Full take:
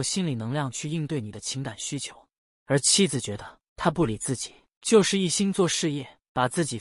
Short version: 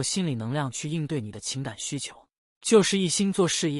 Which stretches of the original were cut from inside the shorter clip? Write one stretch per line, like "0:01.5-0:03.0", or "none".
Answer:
0:02.6-0:04.8